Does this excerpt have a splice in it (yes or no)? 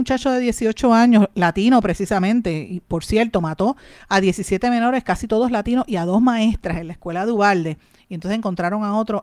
no